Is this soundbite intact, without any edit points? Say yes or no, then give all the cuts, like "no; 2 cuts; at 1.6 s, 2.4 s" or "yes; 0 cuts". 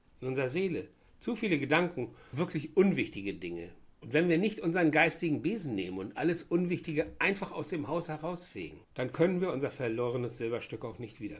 no; 3 cuts; at 2.3 s, 3.9 s, 8.8 s